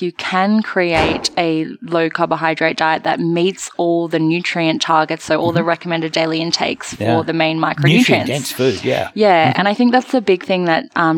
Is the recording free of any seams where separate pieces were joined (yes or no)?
yes